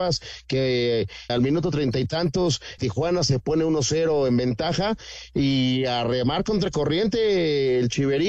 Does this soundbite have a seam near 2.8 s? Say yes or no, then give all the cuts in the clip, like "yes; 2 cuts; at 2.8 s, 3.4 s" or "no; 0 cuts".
yes; 2 cuts; at 1.3 s, 2.8 s